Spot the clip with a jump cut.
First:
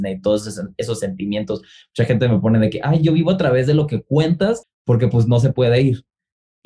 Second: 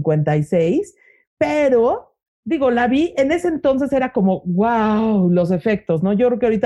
first; 1 cut; at 4.6 s

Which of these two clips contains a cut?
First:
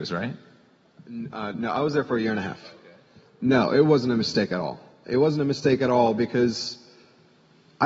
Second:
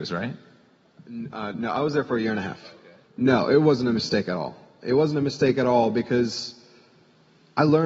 second; 1 cut; at 3.0 s

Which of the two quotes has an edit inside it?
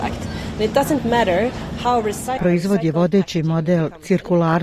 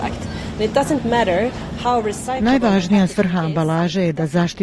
first; 1 cut; at 2.4 s

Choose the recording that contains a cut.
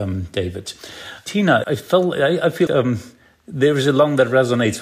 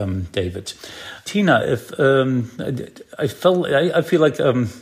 first; 2 cuts; at 1.6 s, 2.7 s

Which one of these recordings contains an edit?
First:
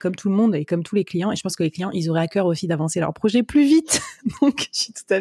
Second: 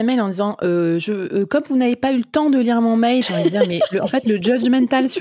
second; 1 cut; at 3.2 s

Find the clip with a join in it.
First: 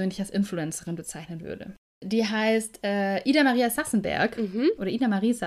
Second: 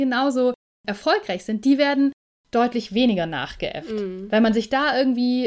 first; 1 cut; at 1.9 s

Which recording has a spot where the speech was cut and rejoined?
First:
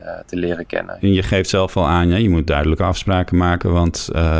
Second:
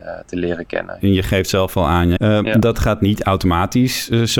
second; 1 cut; at 2.2 s

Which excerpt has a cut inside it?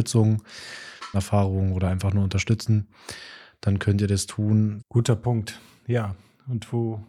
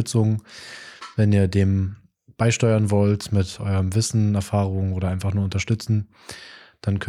first; 2 cuts; at 1.1 s, 4.8 s

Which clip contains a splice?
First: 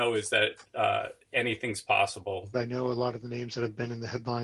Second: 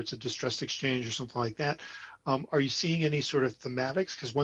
first; 1 cut; at 2.5 s

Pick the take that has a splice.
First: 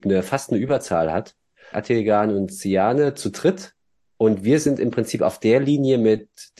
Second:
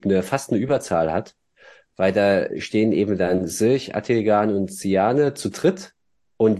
first; 1 cut; at 1.7 s

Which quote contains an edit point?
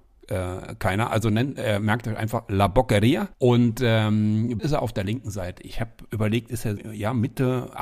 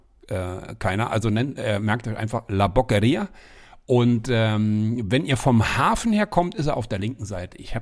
first; 3 cuts; at 3.3 s, 4.6 s, 6.8 s

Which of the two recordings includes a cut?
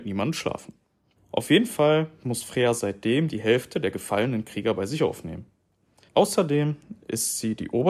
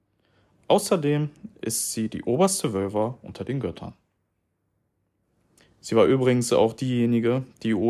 first; 2 cuts; at 1.2 s, 6.1 s

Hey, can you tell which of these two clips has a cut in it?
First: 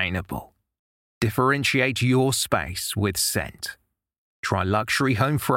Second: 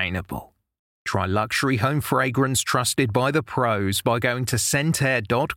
second; 1 cut; at 0.9 s

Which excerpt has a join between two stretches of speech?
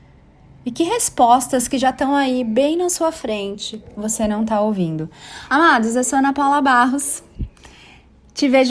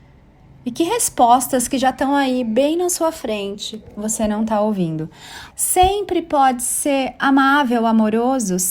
second; 1 cut; at 5.5 s

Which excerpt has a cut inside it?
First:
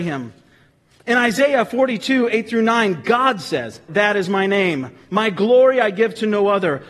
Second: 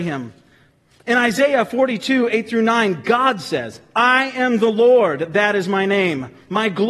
first; 1 cut; at 3.9 s

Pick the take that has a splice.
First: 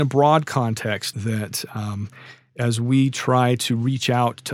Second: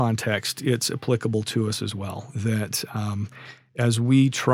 first; 1 cut; at 1.1 s

